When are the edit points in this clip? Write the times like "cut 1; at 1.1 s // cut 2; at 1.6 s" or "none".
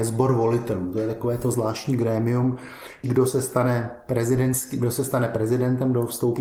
cut 1; at 3.0 s